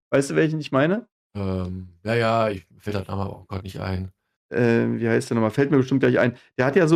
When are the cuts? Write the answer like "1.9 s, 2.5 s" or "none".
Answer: none